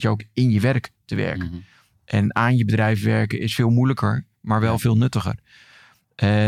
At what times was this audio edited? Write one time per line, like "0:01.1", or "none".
none

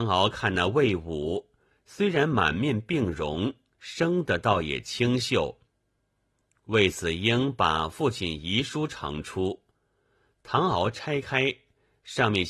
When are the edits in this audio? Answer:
none

